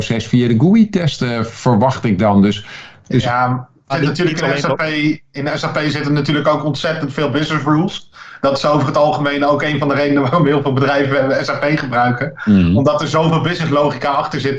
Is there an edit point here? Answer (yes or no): yes